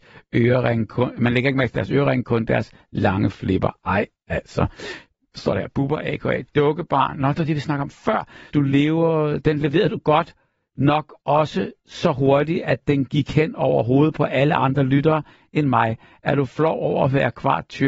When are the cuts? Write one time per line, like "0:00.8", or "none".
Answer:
0:08.5